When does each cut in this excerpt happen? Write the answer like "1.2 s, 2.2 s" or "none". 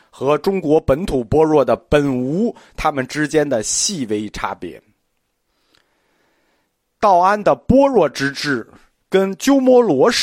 none